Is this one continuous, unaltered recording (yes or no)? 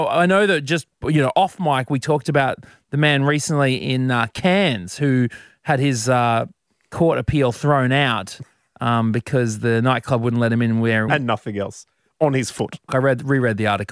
no